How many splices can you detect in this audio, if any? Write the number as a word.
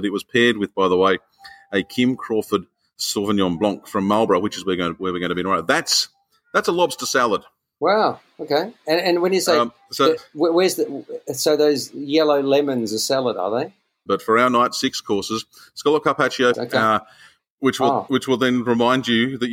two